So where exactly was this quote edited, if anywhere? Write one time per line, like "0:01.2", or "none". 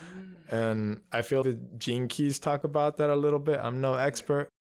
0:01.4